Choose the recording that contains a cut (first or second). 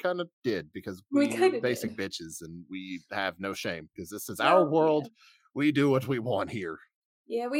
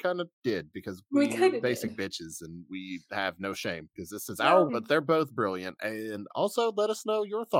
second